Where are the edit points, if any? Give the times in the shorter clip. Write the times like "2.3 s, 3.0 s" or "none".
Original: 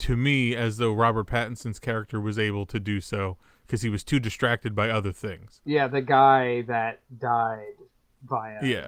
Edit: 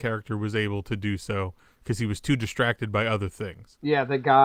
none